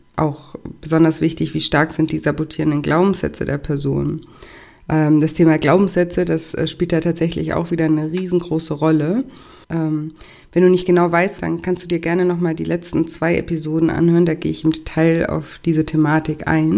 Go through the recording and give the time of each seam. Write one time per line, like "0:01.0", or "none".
0:09.6
0:11.4